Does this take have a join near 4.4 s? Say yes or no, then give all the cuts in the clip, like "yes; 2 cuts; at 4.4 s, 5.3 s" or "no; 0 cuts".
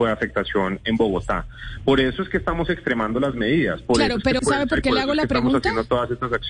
yes; 1 cut; at 4.4 s